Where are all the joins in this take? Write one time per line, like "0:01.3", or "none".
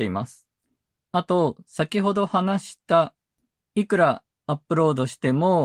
none